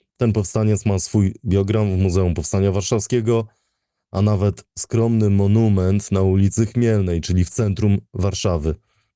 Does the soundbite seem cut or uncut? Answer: uncut